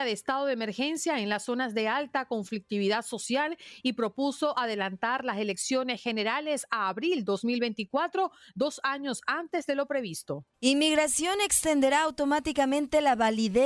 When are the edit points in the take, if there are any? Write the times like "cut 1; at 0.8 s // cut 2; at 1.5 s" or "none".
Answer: cut 1; at 10.5 s